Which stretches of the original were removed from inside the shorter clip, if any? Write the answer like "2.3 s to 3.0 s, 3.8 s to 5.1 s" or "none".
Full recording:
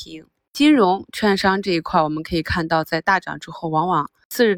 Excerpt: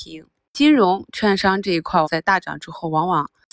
2.0 s to 2.8 s

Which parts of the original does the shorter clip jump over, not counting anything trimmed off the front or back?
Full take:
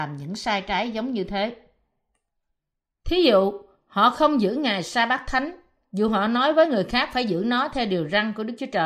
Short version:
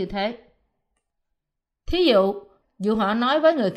3.8 s to 5.8 s

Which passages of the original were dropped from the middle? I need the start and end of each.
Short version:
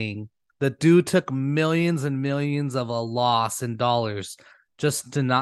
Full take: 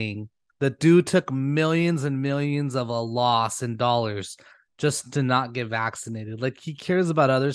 none

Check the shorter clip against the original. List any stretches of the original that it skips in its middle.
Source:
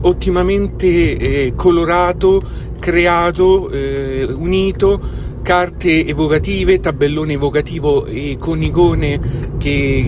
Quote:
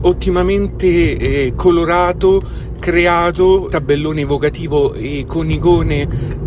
3.7 s to 6.8 s

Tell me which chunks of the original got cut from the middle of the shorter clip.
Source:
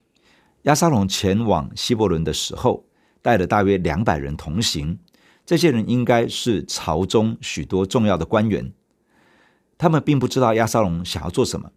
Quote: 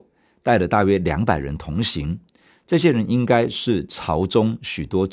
none

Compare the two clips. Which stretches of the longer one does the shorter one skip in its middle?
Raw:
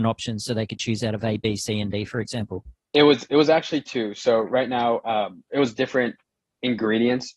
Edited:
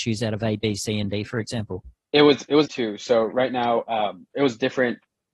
3.5 s to 3.8 s

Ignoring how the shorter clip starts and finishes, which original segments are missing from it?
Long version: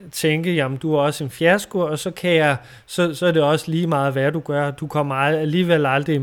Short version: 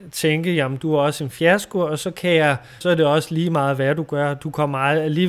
2.8 s to 3.2 s

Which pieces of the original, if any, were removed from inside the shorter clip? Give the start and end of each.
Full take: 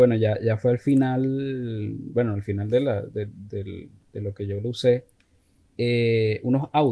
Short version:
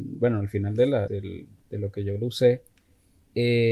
3.0 s to 3.5 s

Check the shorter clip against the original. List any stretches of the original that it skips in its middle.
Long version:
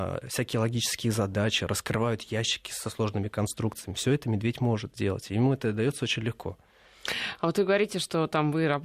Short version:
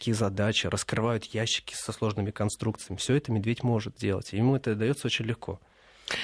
none

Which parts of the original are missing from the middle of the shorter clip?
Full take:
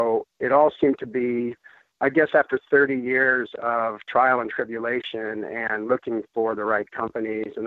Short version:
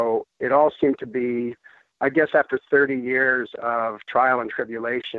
none

